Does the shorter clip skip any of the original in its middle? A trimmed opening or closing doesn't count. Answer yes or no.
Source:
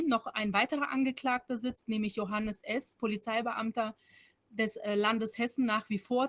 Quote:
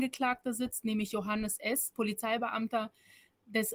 no